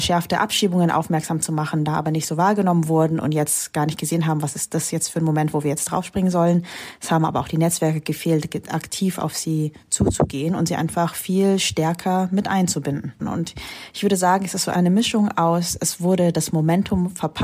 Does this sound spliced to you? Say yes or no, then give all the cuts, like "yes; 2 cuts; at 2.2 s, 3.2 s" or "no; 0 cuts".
yes; 1 cut; at 13.2 s